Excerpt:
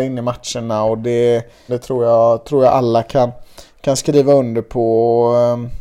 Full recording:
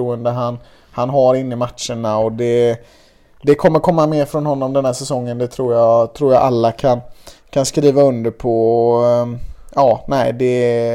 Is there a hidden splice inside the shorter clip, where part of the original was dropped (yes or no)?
yes